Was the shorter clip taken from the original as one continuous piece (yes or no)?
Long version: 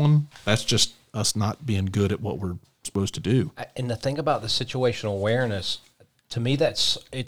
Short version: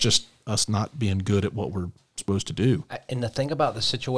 yes